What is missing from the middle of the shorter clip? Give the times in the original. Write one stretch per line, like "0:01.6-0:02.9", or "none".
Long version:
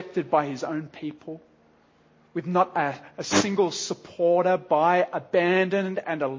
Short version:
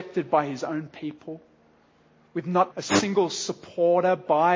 0:02.7-0:03.1